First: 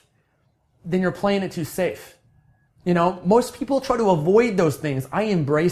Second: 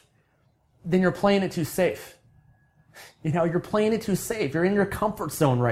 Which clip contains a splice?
first; 1 cut; at 2.7 s

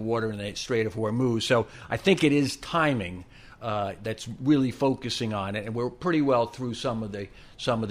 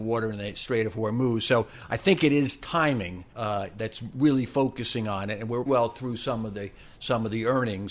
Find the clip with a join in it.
second; 2 cuts; at 3.3 s, 5.7 s

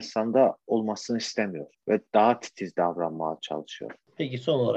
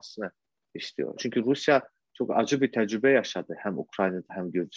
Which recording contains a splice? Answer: second; 1 cut; at 1.2 s

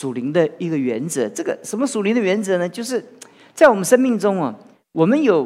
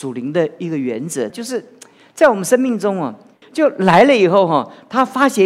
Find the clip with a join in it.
second; 2 cuts; at 1.3 s, 3.4 s

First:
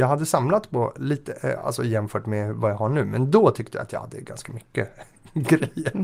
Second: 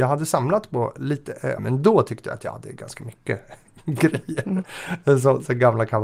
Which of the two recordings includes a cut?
second; 1 cut; at 1.6 s

